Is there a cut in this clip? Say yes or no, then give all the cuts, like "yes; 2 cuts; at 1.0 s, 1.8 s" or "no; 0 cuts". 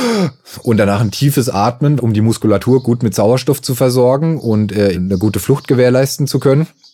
yes; 2 cuts; at 2.0 s, 4.9 s